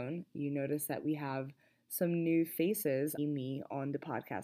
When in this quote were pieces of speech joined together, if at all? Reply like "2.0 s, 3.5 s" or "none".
3.2 s